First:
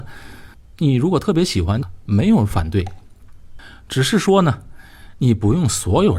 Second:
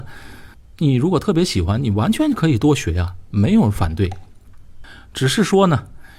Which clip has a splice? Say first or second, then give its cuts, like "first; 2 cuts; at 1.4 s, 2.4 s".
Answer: first; 1 cut; at 1.8 s